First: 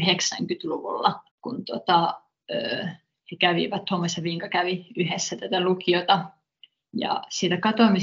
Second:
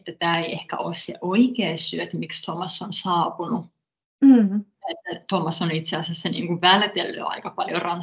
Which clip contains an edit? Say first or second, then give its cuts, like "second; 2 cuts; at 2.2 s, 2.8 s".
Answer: first; 1 cut; at 1.3 s